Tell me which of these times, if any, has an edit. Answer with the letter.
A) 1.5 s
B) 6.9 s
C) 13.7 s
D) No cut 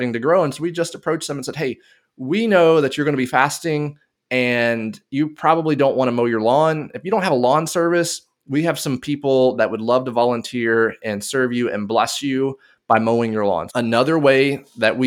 C